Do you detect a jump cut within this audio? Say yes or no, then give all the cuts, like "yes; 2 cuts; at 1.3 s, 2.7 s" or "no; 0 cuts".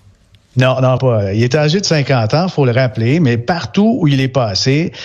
yes; 1 cut; at 1.0 s